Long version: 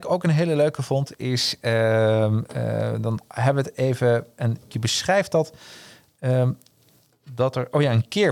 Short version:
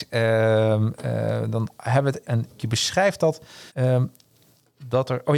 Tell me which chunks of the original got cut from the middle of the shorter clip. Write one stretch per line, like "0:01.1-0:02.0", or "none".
0:03.7-0:04.3
0:05.8-0:06.1